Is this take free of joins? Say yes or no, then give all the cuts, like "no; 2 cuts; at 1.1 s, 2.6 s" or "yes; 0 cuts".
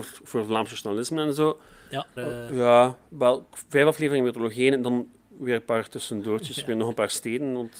no; 1 cut; at 2.2 s